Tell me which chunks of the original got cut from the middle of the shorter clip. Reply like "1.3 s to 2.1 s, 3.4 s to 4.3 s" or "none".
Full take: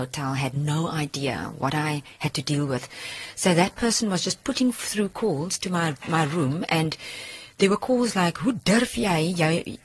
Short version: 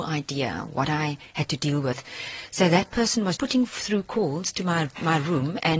4.2 s to 4.4 s